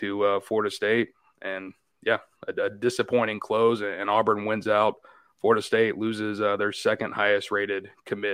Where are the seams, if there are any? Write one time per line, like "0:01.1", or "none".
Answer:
none